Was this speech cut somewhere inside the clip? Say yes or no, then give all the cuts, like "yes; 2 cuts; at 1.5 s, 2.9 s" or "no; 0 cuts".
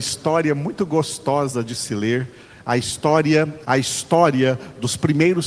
yes; 1 cut; at 3.7 s